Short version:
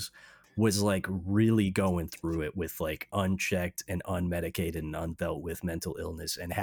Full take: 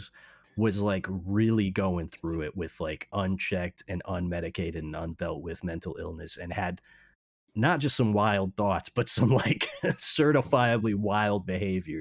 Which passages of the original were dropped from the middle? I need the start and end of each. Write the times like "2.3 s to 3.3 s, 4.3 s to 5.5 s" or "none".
none

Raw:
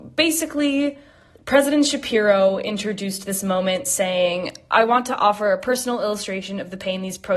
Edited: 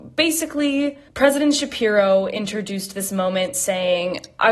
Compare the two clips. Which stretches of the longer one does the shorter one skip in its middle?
1.1 s to 1.4 s

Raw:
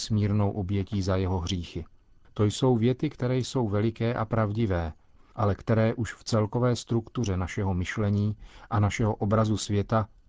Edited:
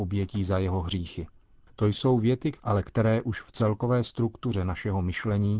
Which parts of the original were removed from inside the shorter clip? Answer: 3.1 s to 5.3 s

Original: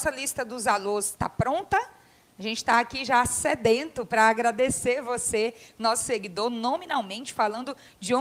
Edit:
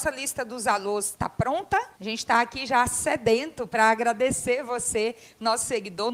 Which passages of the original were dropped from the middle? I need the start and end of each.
1.9 s to 2.3 s

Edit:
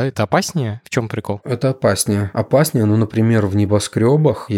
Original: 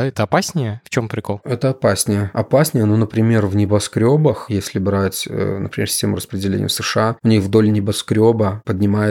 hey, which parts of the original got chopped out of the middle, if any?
none

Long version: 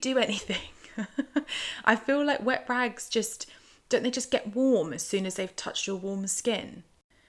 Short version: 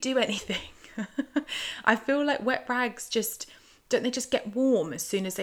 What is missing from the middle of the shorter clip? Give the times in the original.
none

